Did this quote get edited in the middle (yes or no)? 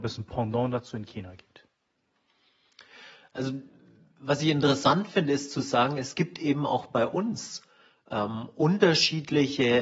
no